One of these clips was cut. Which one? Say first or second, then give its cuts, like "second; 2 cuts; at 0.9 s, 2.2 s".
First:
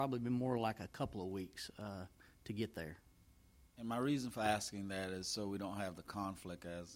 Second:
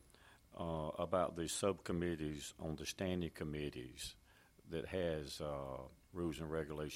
second; 1 cut; at 6.0 s